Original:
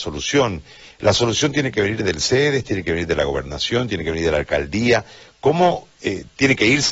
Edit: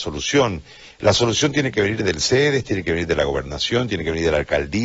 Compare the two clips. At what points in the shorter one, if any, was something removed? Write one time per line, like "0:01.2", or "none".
none